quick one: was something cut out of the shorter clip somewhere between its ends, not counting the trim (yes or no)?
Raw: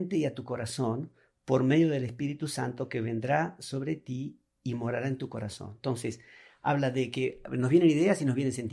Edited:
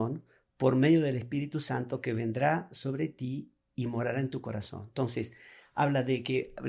no